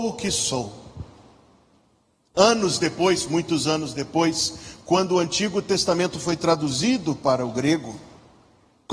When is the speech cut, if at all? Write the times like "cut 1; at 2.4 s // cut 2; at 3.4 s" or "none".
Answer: none